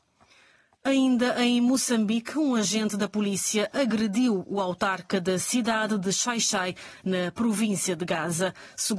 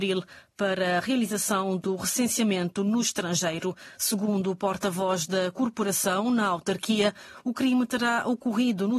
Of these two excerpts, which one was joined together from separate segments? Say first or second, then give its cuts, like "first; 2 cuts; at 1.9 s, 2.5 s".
second; 1 cut; at 3.9 s